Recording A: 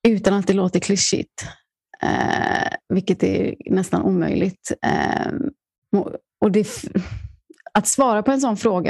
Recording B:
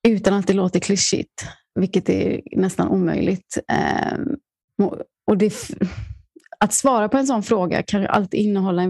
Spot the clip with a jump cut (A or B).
B